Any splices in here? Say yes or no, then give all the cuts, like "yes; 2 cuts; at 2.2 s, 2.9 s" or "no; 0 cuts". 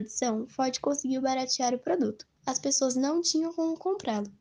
yes; 1 cut; at 2.4 s